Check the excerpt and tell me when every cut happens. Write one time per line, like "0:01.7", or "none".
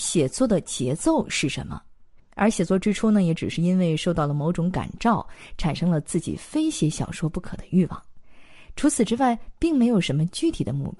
0:02.2